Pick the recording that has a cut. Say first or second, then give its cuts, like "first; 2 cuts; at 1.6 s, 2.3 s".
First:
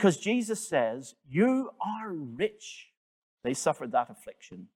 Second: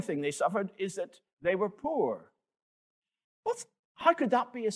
first; 1 cut; at 3.2 s